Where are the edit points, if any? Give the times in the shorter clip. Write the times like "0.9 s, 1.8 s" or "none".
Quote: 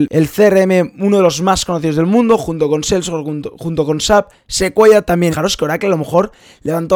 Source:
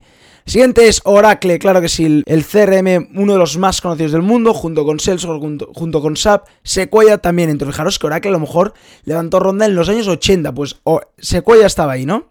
5.3 s